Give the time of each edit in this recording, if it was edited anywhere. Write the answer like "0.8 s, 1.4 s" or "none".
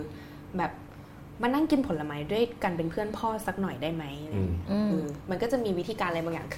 4.9 s